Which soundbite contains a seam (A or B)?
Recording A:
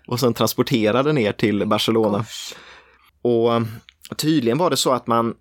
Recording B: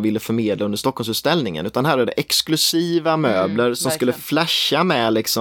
A